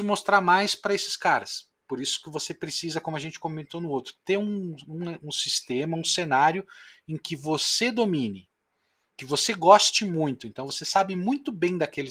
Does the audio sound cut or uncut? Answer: uncut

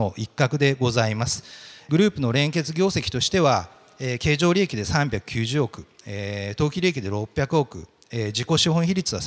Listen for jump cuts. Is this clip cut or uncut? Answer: uncut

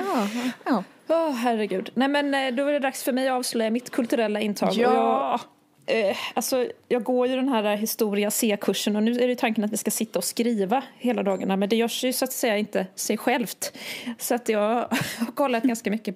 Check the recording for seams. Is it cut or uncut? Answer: uncut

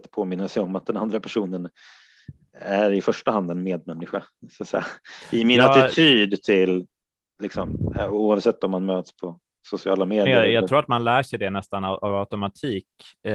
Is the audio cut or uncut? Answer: uncut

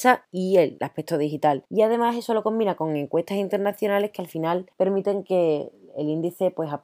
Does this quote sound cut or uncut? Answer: uncut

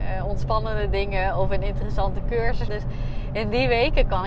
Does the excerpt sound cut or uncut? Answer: cut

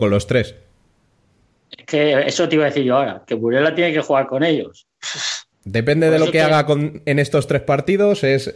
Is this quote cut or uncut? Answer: cut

